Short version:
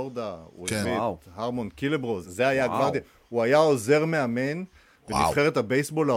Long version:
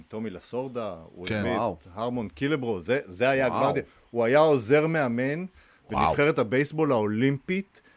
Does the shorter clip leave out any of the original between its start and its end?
yes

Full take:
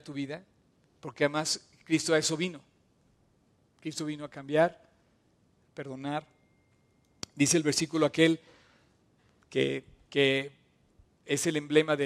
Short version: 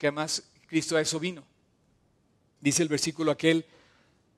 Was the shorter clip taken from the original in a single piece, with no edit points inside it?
no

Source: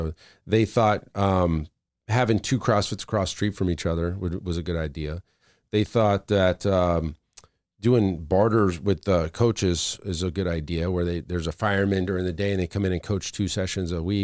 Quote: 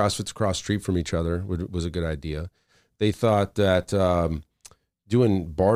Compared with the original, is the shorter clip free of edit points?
yes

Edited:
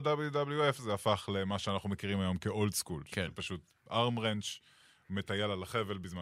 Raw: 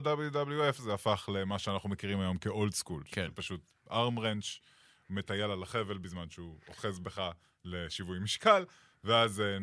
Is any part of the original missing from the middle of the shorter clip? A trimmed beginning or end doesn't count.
no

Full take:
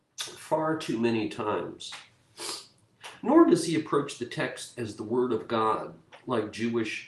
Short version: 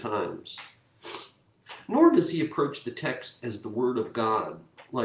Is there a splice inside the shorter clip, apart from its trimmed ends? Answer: no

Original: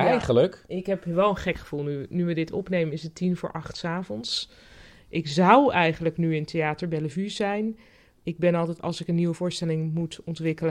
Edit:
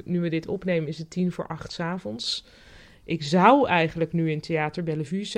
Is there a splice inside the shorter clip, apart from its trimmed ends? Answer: no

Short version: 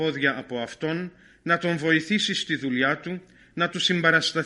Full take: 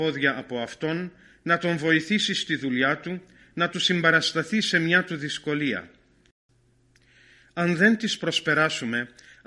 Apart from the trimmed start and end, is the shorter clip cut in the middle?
no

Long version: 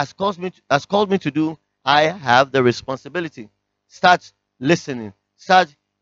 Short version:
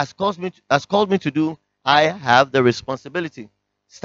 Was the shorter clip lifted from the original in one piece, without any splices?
yes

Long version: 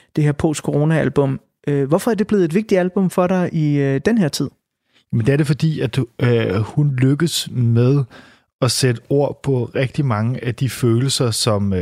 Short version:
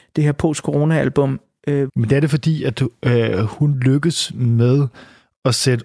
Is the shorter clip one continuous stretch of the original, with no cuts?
no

